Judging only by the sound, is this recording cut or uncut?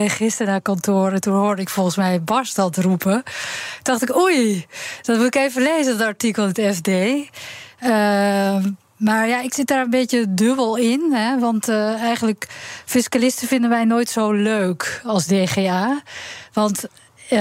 uncut